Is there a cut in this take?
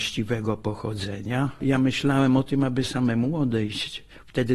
no; 0 cuts

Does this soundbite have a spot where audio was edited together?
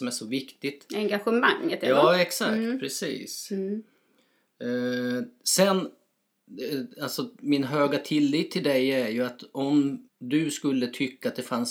yes; 1 cut; at 10.1 s

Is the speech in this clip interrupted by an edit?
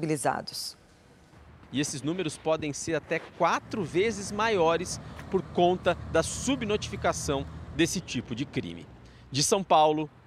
yes; 1 cut; at 1.6 s

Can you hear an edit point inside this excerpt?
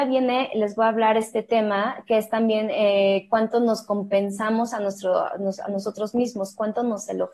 no; 0 cuts

